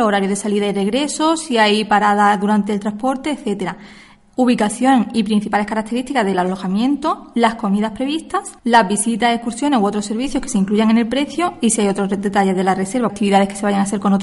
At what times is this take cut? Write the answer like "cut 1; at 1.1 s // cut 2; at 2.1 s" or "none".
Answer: cut 1; at 8.6 s // cut 2; at 13.1 s